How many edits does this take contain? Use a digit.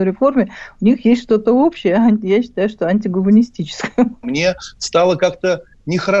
1